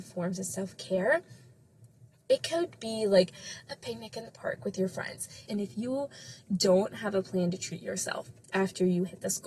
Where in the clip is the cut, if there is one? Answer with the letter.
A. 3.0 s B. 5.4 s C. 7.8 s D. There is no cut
B